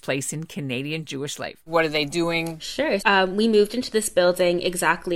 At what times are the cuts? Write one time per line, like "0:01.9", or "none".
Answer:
0:01.7
0:03.0